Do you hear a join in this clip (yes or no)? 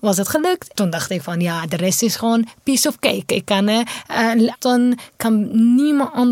yes